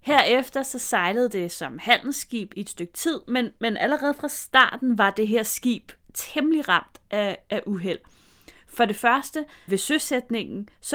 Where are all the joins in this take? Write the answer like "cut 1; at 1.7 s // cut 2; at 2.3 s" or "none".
cut 1; at 2.5 s // cut 2; at 9.7 s